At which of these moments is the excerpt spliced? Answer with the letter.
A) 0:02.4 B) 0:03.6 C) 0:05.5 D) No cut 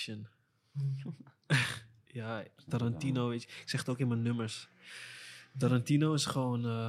D